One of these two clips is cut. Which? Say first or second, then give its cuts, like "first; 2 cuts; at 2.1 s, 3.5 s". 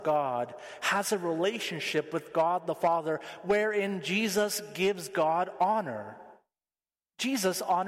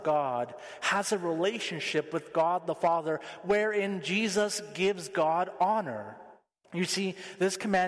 second; 1 cut; at 6.6 s